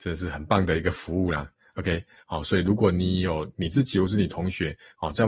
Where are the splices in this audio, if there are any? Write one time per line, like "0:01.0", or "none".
0:02.2

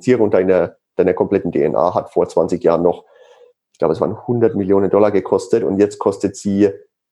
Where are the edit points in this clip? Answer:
none

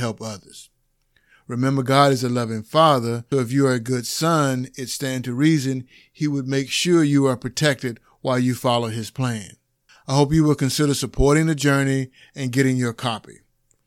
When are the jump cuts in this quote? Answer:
0:03.3
0:09.9

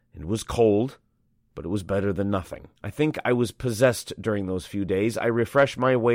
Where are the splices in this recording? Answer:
0:02.8

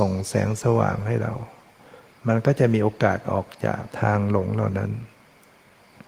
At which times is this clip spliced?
0:03.9

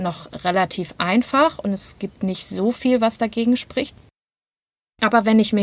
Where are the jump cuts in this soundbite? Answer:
none

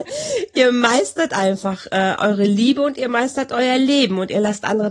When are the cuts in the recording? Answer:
none

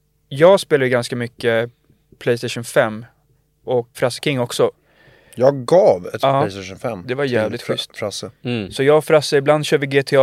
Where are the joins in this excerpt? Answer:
0:03.9

